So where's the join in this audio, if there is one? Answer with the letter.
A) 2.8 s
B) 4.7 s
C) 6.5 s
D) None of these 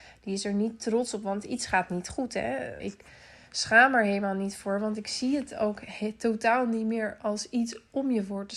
A